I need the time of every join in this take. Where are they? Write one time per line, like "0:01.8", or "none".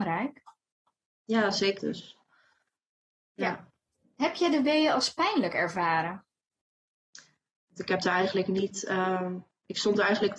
0:01.8
0:04.0
0:07.6